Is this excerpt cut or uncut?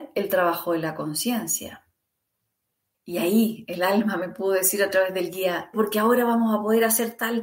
cut